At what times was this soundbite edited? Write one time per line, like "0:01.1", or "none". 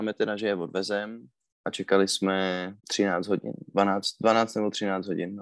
0:02.8